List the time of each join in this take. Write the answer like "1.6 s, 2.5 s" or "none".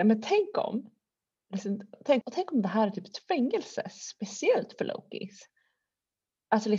2.2 s